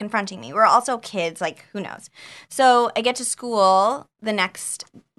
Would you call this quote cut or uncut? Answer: uncut